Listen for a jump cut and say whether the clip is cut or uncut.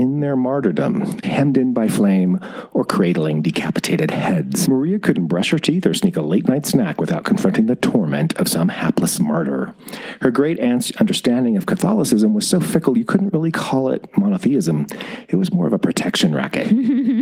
cut